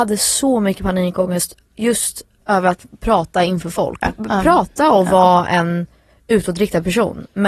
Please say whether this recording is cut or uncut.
cut